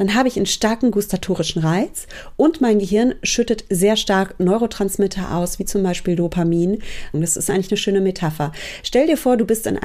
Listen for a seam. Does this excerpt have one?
yes; 1 cut; at 7.1 s

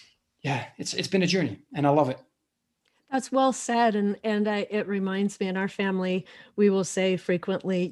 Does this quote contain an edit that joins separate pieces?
no; 0 cuts

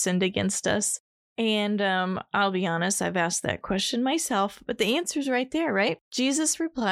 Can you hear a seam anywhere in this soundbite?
yes; 1 cut; at 6.0 s

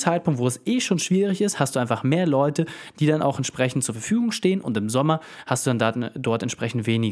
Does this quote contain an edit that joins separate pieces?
no; 0 cuts

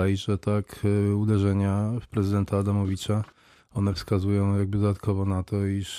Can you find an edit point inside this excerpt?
no; 0 cuts

